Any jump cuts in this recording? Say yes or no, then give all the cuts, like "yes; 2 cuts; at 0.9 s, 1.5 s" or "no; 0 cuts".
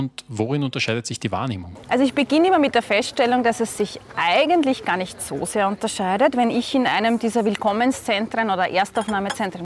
no; 0 cuts